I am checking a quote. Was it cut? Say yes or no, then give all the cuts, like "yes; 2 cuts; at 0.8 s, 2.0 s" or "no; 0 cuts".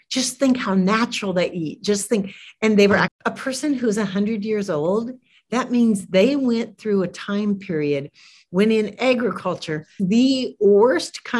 yes; 2 cuts; at 3.1 s, 10.0 s